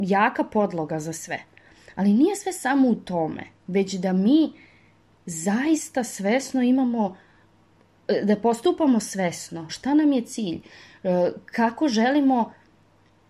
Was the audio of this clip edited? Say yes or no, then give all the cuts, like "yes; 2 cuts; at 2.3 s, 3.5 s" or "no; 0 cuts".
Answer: yes; 1 cut; at 9.7 s